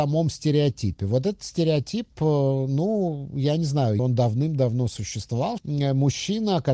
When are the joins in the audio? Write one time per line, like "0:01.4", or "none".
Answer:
0:04.0
0:05.6

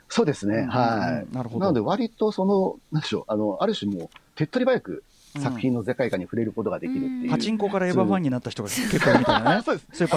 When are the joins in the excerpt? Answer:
none

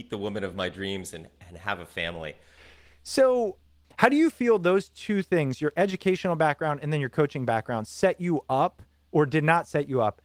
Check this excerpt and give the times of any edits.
0:02.6

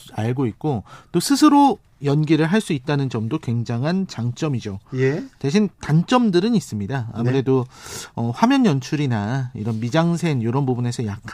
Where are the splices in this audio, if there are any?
none

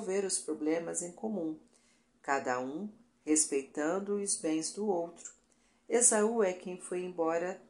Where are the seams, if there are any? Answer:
none

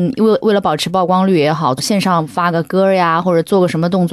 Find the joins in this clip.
0:01.8

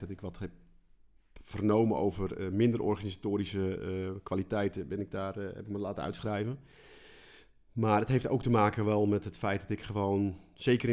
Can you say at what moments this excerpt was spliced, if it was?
none

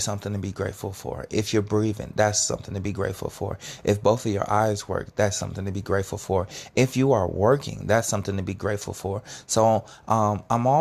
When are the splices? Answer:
none

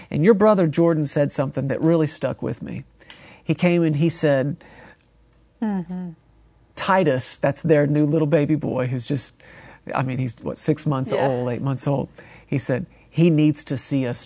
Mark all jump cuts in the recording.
none

